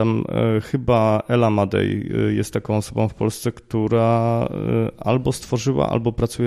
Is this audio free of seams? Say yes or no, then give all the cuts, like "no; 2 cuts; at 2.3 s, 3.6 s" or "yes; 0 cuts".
yes; 0 cuts